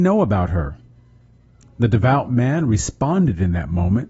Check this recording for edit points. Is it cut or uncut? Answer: cut